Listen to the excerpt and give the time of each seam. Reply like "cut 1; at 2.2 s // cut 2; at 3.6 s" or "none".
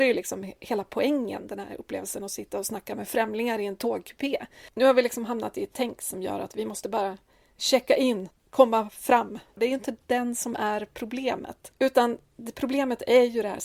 cut 1; at 8.3 s // cut 2; at 9.6 s